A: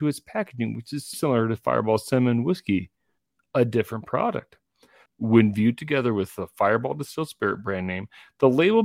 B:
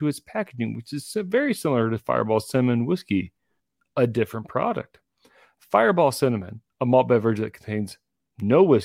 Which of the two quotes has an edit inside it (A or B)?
A